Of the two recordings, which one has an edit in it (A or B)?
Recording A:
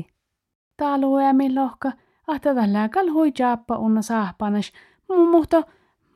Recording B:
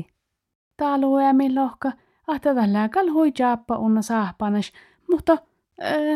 B